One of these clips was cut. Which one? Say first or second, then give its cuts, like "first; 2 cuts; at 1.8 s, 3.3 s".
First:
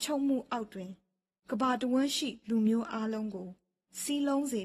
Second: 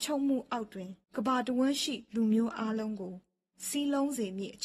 second; 1 cut; at 1.0 s